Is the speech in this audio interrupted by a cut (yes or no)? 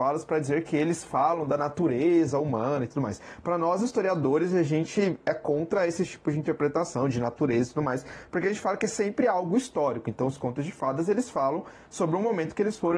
no